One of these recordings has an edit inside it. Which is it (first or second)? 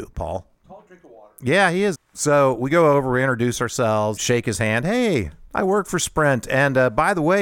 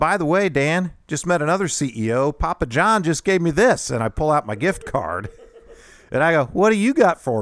first